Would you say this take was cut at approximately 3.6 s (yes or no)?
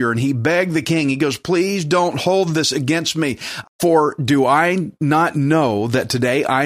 yes